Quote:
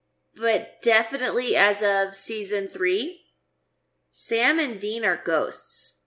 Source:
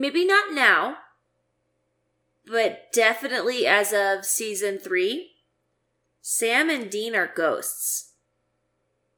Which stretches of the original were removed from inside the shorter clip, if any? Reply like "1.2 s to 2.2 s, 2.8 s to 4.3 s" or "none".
none